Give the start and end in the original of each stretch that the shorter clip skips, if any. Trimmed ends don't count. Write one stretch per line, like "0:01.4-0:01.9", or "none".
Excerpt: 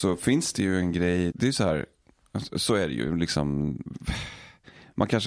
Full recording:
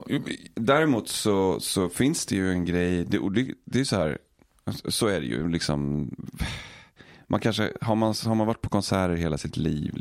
0:03.0-0:03.6